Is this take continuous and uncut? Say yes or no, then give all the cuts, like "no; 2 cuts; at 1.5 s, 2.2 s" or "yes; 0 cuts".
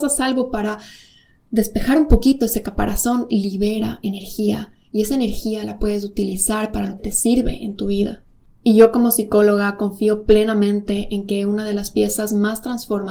no; 1 cut; at 7.0 s